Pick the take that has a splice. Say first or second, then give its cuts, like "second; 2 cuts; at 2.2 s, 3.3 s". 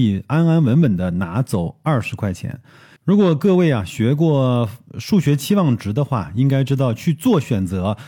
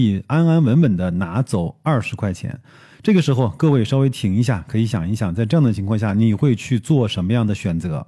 first; 1 cut; at 3.0 s